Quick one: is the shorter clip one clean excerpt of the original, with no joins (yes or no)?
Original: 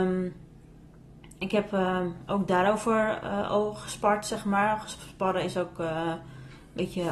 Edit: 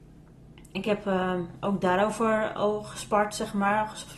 no